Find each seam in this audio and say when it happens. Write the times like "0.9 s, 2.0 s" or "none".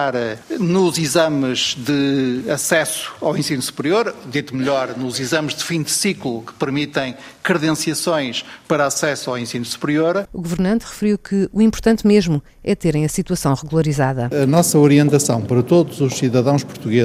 10.3 s